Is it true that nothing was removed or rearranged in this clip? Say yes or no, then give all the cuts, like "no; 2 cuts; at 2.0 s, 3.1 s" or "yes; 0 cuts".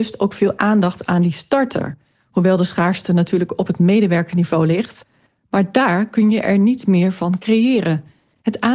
yes; 0 cuts